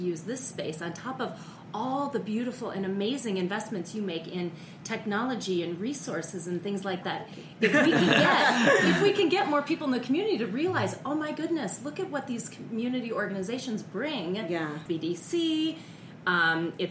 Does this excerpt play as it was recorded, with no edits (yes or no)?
no